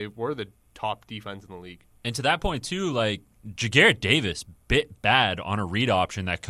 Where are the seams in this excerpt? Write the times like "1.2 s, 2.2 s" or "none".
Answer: none